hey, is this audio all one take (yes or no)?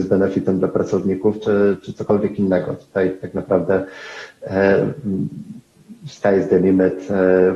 yes